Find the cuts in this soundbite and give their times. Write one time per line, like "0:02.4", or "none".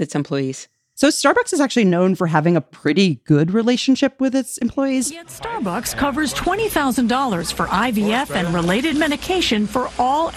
none